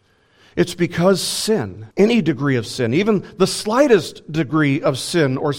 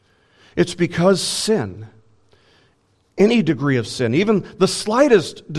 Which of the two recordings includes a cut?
first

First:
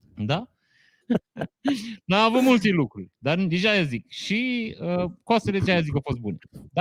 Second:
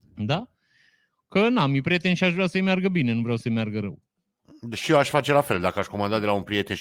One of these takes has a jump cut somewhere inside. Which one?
first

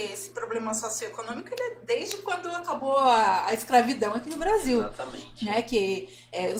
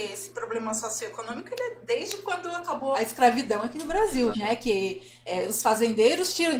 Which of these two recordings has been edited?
second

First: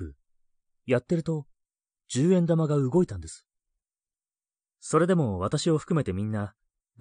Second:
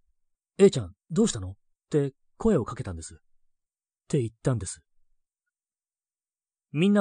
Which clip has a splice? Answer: second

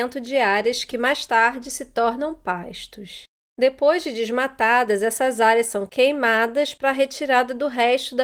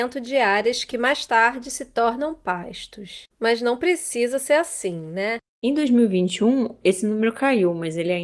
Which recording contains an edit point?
second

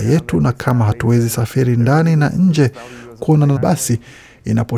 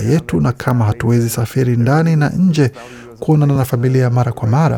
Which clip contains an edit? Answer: first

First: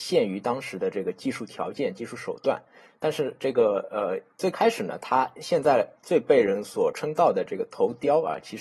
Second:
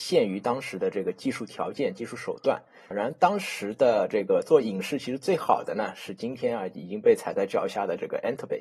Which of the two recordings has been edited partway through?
second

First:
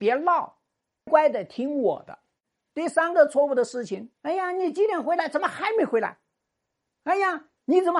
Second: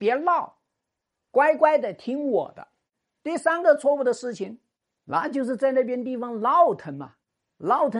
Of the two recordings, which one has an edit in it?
first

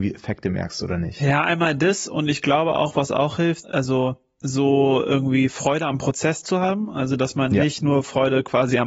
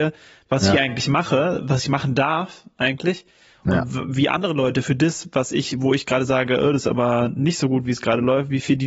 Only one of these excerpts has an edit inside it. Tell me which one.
first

